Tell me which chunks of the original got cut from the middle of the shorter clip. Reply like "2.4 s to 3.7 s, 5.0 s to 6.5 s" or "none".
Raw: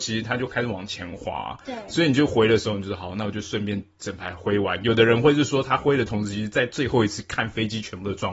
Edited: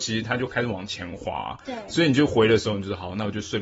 none